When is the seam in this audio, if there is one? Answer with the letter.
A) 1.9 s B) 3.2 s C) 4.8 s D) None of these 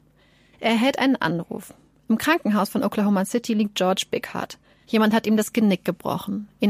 C